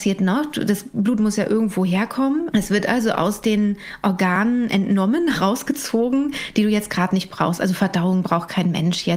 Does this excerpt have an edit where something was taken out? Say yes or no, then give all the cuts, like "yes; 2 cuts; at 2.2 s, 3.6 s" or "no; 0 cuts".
yes; 1 cut; at 2.5 s